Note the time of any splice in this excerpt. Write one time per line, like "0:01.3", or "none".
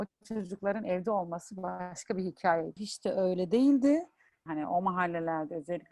0:02.8
0:04.5